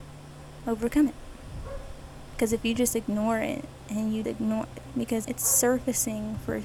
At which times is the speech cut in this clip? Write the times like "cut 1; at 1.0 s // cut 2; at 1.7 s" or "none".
cut 1; at 4.2 s // cut 2; at 5.2 s